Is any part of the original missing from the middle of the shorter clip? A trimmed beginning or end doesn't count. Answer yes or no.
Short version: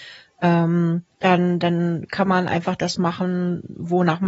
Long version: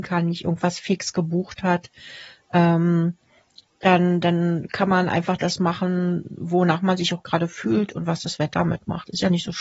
yes